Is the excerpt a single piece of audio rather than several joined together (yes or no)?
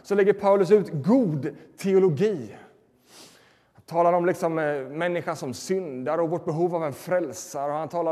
yes